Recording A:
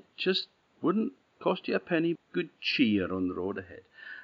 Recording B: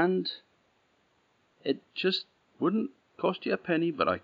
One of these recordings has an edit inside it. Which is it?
A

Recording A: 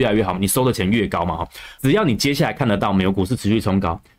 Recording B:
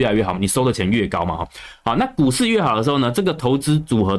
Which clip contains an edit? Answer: A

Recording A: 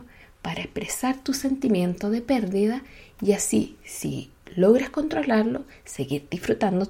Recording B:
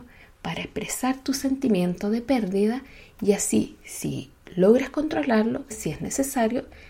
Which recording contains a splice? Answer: B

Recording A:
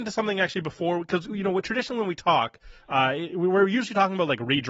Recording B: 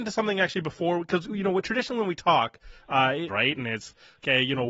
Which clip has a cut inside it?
B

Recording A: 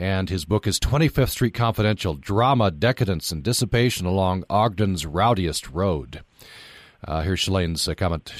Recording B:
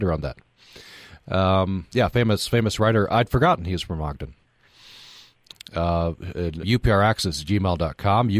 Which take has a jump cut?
B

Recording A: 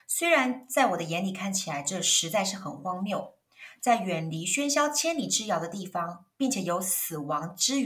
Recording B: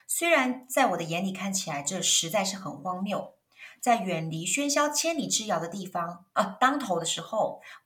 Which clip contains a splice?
B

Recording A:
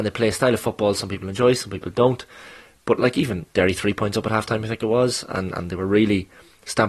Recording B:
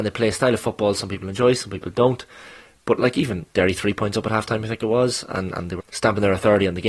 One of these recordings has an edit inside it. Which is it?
B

